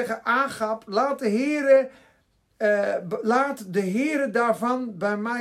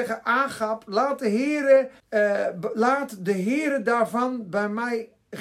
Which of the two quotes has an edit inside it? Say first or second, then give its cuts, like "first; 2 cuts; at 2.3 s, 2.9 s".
second; 1 cut; at 2.0 s